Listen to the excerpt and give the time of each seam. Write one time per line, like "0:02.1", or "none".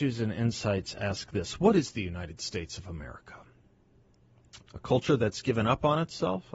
0:04.6